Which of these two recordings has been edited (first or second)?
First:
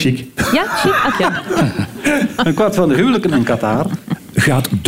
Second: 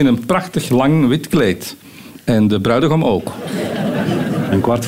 first